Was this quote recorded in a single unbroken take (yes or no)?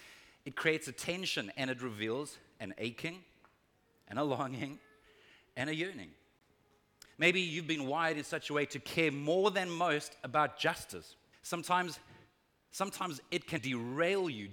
no